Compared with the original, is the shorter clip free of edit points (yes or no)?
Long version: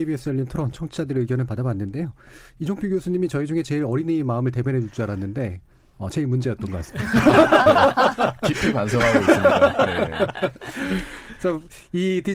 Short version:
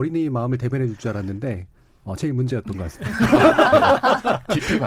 yes